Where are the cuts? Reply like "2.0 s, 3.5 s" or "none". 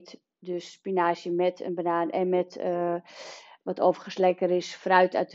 none